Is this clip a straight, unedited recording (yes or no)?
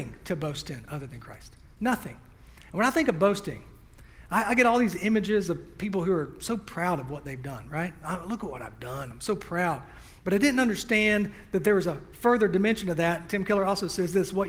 yes